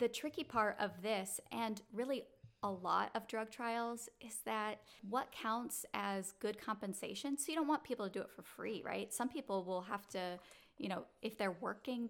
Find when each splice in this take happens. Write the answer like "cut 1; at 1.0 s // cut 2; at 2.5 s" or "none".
none